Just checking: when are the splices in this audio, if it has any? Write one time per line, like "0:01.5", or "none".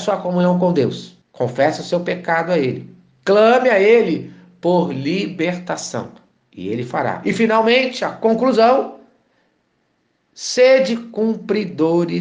0:01.2